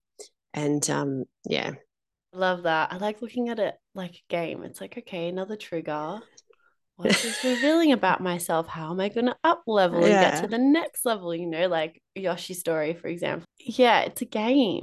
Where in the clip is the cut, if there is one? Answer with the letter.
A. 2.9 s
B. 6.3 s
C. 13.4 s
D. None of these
C